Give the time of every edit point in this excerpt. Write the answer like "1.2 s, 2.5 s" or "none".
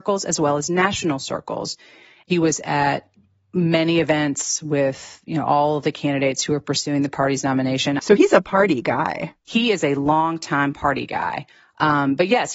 8.0 s